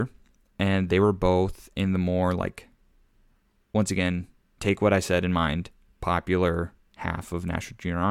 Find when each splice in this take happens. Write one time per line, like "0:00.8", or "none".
none